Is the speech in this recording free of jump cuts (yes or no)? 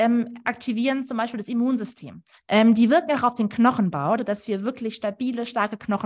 no